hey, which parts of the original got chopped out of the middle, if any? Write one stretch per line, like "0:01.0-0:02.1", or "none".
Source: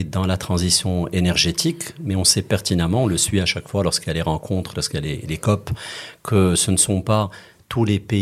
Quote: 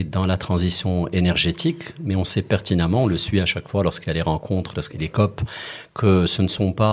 0:04.9-0:05.2

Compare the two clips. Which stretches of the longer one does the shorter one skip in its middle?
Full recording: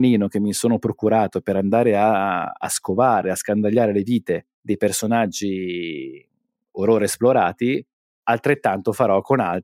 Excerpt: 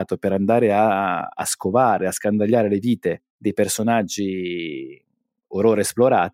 none

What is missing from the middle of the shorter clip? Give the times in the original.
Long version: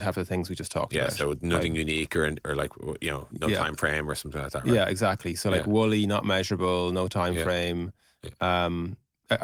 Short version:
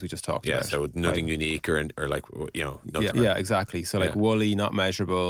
0:03.6-0:04.6

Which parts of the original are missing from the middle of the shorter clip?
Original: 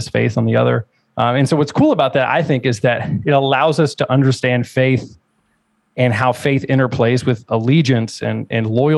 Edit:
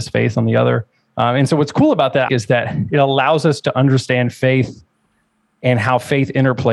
0:02.3-0:02.6

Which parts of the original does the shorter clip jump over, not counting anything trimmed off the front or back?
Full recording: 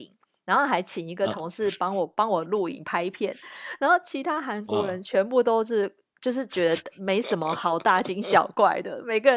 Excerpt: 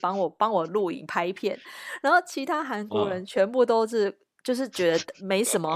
none

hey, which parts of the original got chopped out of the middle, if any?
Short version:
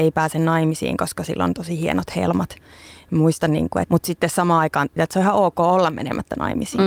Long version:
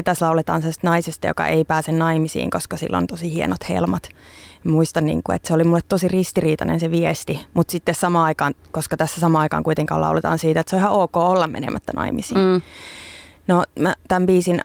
0:05.4-0:07.5
0:08.6-0:10.5

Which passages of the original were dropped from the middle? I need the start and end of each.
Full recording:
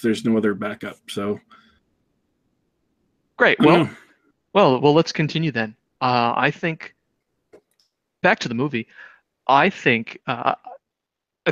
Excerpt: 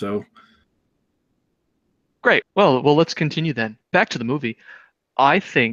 0:03.6-0:04.4
0:05.8-0:08.1

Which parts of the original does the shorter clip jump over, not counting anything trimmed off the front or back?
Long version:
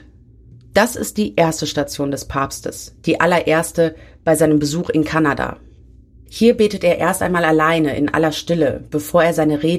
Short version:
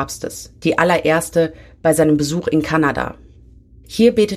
none

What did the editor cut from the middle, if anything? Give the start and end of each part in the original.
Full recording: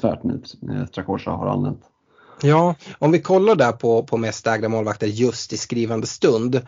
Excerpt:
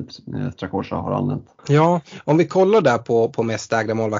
0:01.9-0:02.3

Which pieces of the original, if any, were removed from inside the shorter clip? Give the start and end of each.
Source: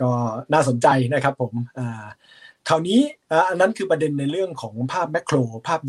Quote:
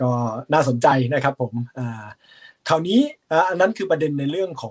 none

